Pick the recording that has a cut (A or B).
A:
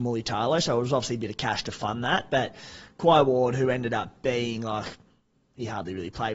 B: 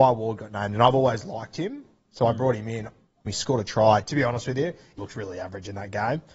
B